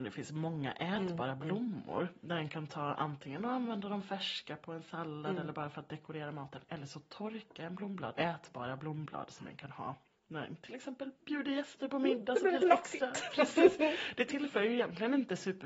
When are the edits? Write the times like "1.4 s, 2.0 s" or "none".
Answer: 8.2 s, 12.6 s